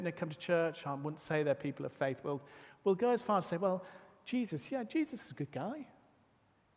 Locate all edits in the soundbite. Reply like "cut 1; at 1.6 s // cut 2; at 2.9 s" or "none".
none